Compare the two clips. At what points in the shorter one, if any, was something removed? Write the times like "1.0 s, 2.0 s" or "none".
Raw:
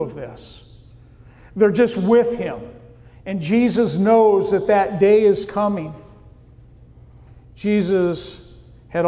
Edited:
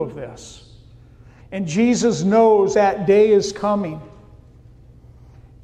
1.4 s, 2.7 s